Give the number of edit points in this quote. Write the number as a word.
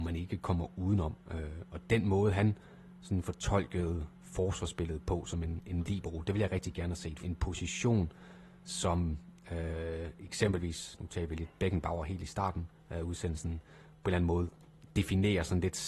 one